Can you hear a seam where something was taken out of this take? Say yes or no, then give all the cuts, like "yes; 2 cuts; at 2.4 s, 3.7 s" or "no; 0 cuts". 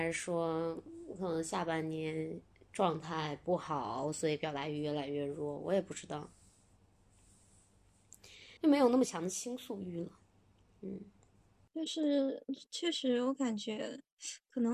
yes; 1 cut; at 8.6 s